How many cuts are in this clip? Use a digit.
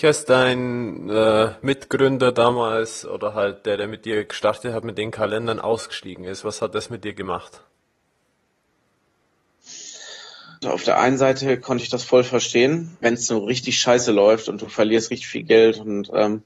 2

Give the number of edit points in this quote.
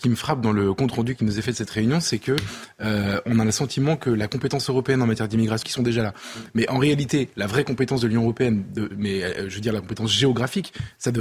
1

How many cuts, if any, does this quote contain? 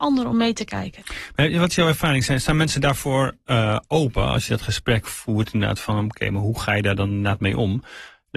0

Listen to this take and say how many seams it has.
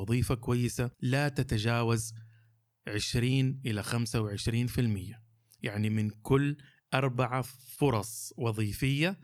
1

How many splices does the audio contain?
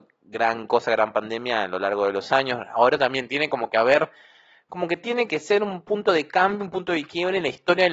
1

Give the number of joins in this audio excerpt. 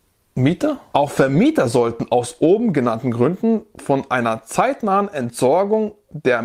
1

